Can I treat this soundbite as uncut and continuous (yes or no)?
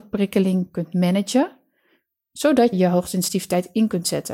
no